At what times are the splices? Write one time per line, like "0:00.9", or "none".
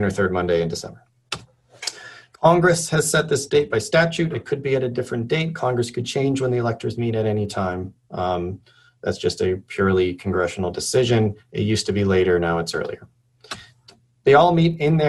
none